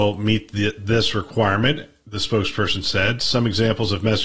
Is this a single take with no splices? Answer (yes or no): yes